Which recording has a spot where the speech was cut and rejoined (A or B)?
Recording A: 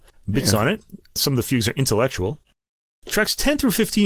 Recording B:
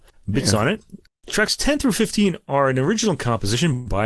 B